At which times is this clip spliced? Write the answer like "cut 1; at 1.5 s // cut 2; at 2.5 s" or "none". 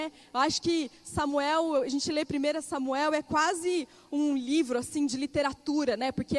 none